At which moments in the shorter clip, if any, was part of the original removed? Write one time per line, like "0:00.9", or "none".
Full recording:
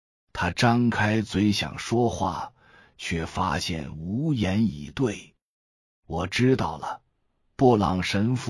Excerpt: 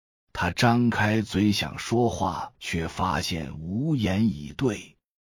0:02.5